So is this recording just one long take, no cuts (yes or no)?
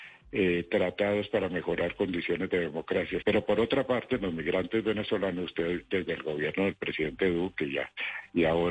no